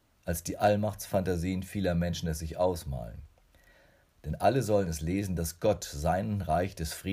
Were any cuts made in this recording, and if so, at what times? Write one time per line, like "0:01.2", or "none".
0:04.0